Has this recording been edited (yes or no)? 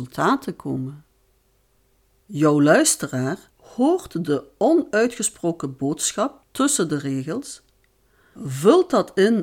yes